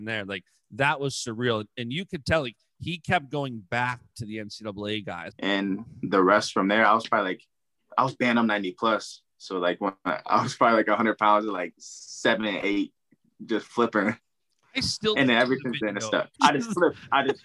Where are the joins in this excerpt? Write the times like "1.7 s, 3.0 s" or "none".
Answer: 5.3 s, 16.3 s